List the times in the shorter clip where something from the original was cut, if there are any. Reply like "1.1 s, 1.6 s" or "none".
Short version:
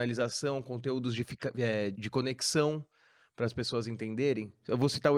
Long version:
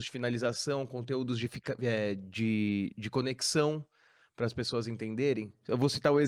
1.9 s